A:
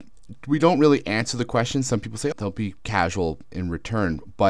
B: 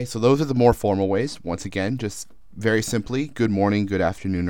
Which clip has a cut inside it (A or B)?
A